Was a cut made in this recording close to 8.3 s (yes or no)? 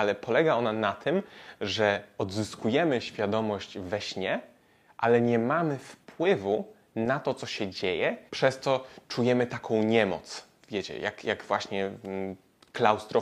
yes